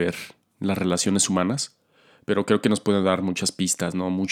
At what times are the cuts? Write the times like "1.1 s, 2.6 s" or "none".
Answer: none

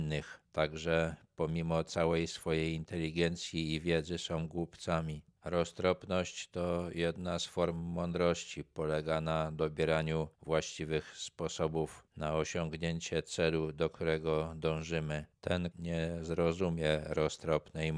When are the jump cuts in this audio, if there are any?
5.4 s, 15.7 s

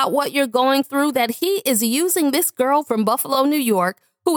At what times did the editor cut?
none

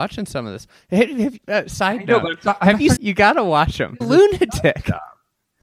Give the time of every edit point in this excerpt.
1.4 s, 3.0 s, 4.0 s

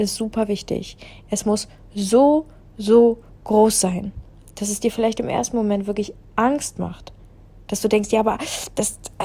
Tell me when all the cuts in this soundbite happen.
none

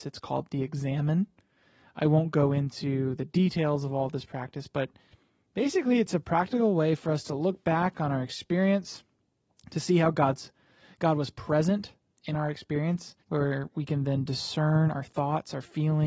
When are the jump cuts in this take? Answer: 13.2 s

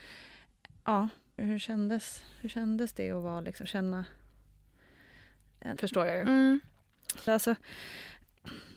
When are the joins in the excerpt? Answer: 1.4 s, 5.8 s, 7.3 s

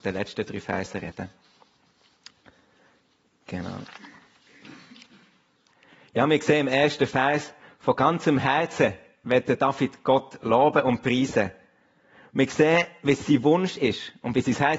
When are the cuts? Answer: none

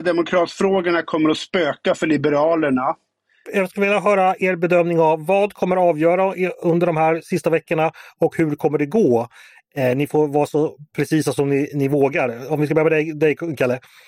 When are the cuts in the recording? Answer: 3.4 s

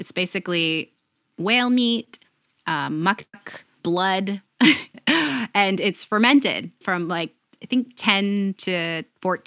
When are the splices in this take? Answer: 3.8 s, 4.9 s

